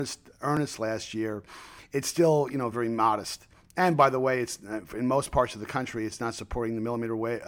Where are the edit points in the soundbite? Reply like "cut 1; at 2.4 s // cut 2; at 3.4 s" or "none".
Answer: cut 1; at 2.7 s